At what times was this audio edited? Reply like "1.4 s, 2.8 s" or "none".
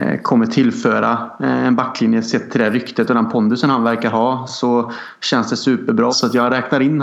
6.1 s